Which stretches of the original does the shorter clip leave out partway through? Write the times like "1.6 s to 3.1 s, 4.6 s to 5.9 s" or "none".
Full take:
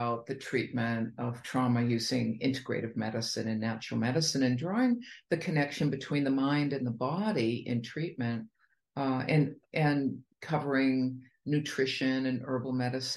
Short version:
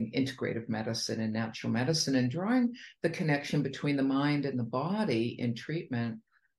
none